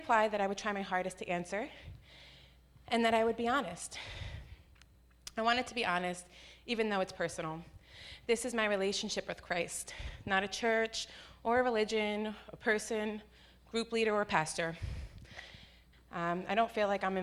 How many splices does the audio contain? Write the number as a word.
one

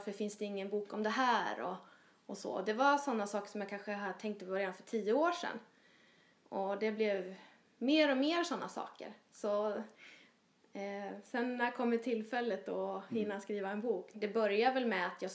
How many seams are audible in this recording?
one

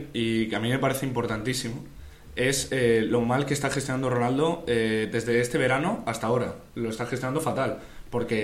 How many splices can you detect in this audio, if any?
zero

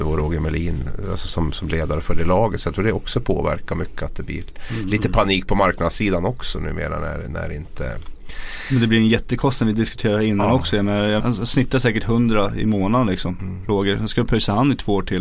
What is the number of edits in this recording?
one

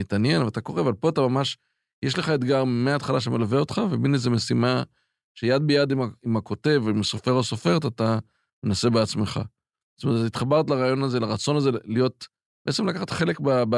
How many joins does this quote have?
zero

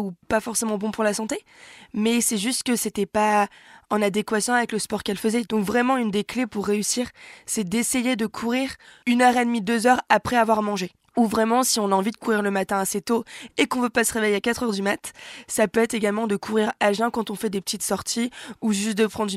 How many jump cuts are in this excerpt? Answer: one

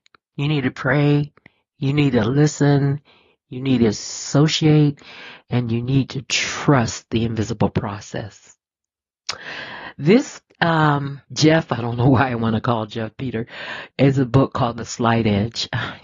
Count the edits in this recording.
two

